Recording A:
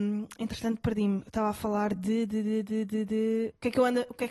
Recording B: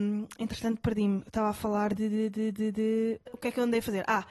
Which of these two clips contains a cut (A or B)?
B